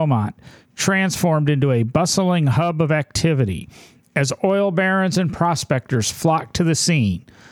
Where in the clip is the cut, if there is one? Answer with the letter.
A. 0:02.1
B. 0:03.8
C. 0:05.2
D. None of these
D